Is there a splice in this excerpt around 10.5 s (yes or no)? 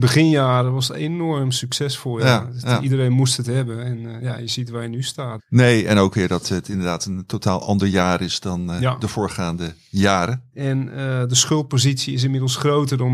yes